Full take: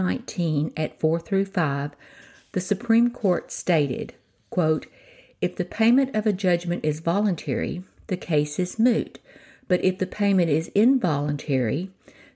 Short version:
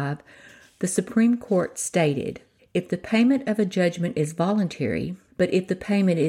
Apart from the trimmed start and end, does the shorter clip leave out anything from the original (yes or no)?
yes